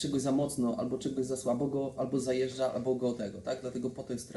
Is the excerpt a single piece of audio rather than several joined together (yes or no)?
no